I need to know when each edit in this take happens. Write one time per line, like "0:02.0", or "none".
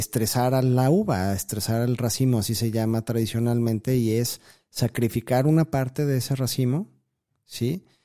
none